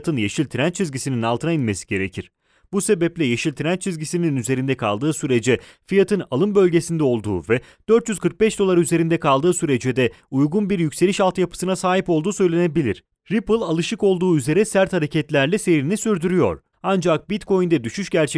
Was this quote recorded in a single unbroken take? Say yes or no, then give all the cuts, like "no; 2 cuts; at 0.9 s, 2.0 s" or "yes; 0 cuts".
no; 2 cuts; at 13.2 s, 16.7 s